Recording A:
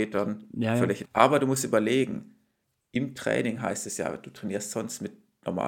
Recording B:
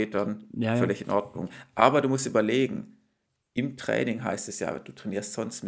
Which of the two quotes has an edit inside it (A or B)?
A